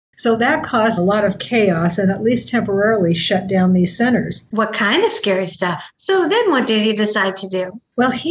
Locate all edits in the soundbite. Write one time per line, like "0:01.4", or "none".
0:01.0
0:04.5
0:06.0